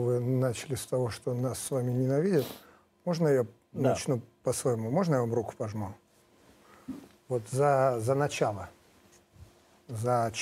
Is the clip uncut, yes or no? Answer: yes